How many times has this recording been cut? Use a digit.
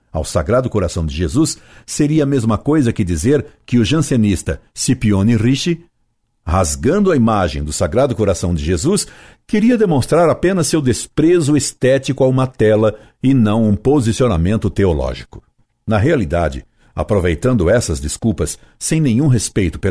0